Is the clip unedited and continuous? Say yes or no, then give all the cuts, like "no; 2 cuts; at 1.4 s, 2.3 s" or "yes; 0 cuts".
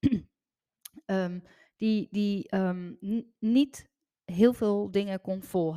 yes; 0 cuts